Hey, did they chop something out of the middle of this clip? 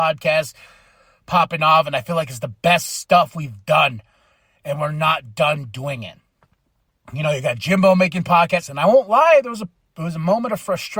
yes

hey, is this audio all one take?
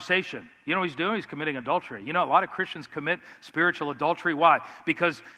yes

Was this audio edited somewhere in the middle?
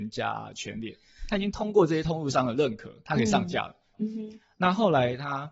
yes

